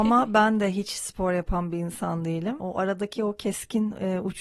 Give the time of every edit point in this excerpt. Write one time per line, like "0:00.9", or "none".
none

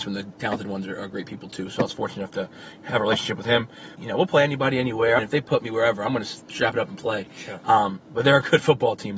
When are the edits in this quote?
0:04.0
0:05.2

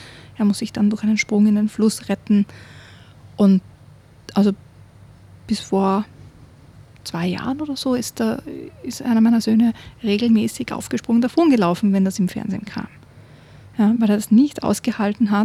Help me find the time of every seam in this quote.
none

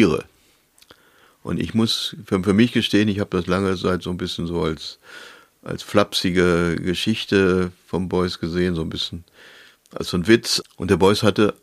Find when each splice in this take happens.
0:10.6

